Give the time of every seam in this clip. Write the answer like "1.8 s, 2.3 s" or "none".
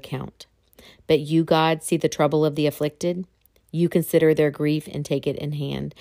none